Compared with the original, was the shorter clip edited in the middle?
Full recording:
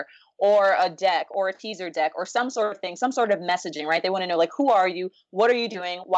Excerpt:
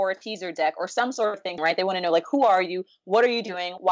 yes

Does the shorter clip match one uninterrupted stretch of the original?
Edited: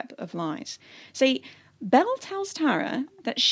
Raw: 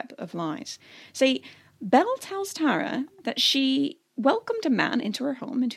yes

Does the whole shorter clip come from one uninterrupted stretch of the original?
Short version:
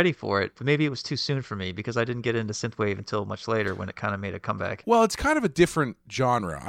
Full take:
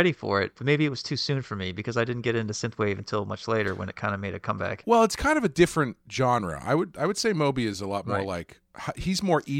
yes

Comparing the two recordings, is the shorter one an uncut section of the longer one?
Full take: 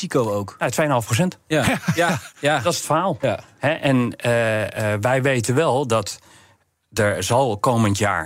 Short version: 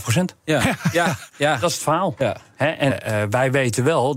no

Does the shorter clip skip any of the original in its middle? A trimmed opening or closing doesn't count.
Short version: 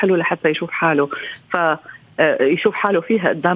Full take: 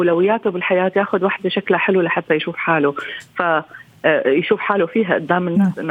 no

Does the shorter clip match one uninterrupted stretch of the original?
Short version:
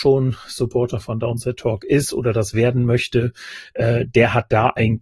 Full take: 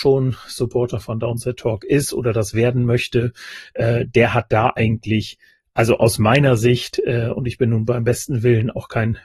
yes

